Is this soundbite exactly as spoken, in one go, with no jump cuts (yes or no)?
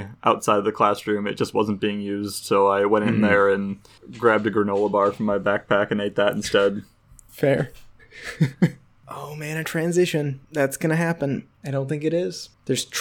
yes